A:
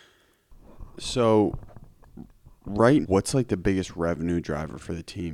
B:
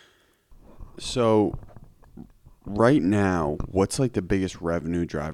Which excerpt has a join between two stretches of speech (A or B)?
A